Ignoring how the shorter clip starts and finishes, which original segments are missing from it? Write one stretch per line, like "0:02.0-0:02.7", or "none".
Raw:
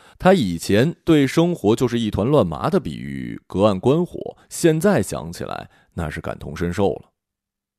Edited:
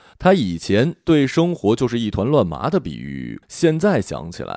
0:03.4-0:04.4

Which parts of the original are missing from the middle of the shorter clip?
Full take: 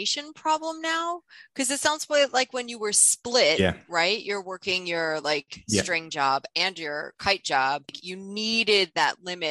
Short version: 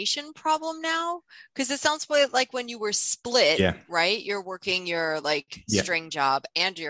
none

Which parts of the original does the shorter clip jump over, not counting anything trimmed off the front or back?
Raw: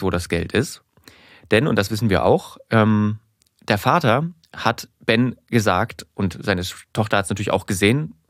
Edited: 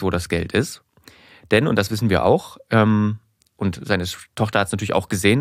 0:03.5-0:06.1

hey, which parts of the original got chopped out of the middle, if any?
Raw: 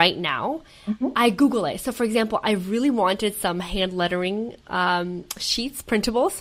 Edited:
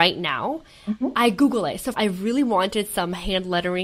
0:01.9-0:02.4

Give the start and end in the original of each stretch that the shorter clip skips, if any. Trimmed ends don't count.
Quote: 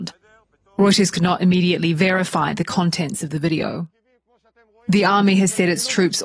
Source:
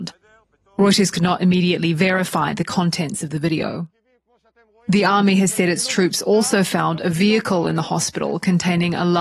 none

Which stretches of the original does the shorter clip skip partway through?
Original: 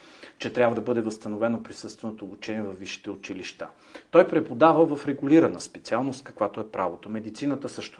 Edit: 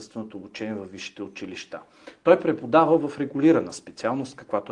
none

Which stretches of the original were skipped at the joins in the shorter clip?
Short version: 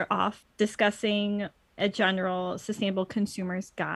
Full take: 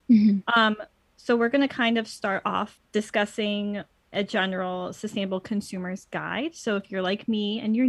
none

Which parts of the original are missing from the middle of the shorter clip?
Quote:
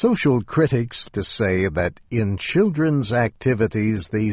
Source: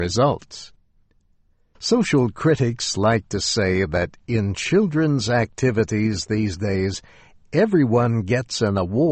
0:02.9-0:03.2

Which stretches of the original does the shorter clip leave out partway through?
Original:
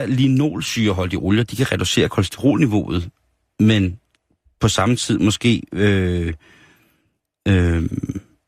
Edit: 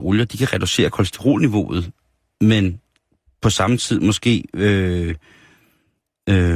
none

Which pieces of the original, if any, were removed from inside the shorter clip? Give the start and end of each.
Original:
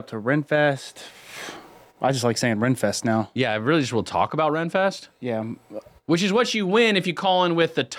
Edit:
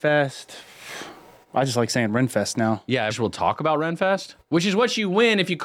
0:03.6-0:03.8
0:05.1-0:06.0

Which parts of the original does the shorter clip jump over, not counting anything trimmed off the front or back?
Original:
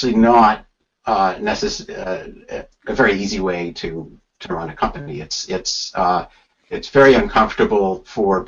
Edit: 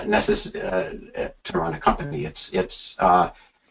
0:02.7-0:04.4

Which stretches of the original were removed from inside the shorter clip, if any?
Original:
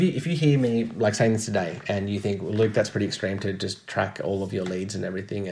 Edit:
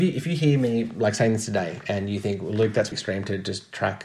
0:02.9-0:03.1

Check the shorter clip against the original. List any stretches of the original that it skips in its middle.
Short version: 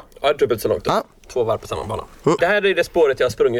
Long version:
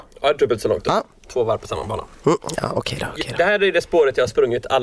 0:02.4-0:03.4

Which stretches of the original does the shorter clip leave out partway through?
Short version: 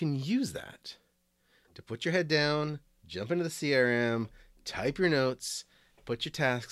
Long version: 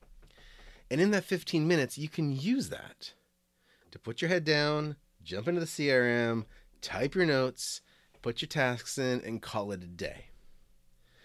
none

